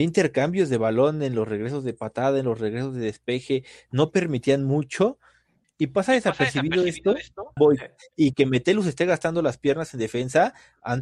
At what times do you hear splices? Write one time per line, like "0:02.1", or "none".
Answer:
0:05.6
0:07.6